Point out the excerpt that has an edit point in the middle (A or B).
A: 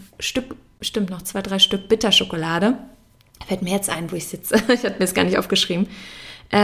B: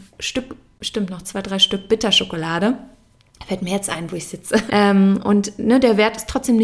B